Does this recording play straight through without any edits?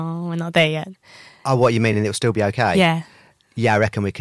yes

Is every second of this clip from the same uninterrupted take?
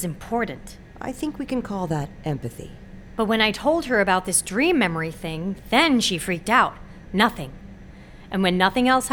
no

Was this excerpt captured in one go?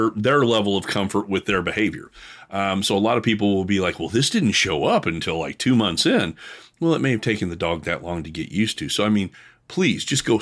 yes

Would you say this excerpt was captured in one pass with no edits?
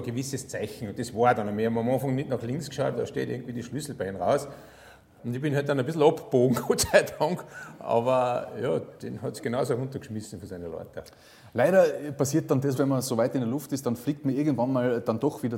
no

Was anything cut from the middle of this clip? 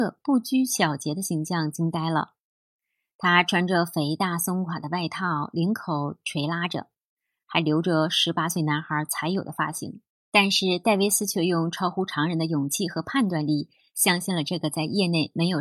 yes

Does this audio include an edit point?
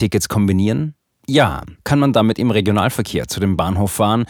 yes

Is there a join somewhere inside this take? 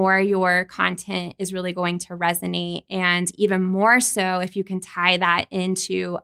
no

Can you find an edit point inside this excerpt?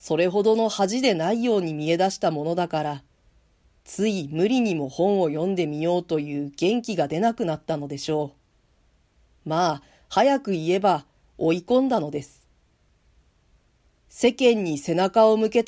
yes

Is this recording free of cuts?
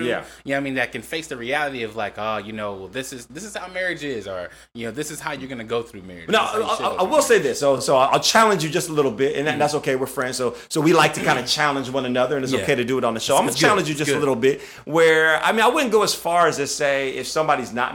yes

